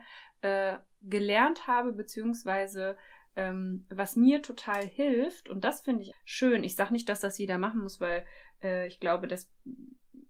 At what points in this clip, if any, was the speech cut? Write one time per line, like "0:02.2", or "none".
0:06.1